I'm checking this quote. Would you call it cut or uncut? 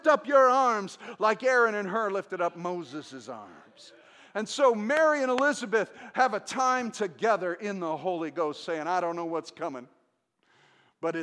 uncut